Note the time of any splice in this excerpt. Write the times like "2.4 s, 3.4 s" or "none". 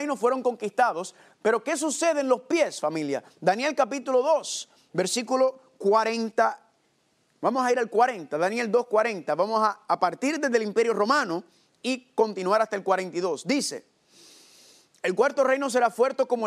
none